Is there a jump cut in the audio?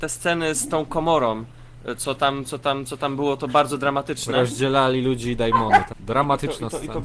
yes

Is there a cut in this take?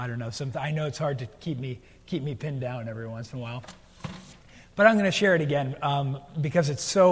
no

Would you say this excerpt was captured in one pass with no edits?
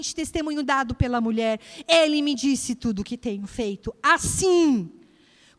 yes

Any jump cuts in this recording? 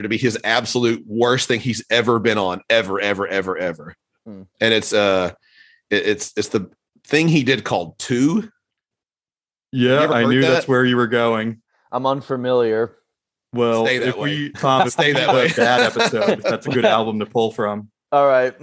no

